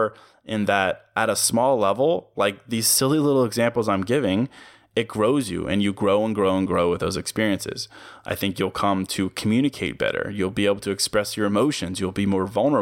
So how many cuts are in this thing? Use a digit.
0